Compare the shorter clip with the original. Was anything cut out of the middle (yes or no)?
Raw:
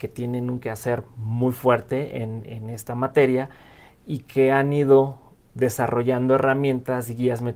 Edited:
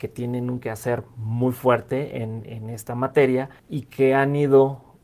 yes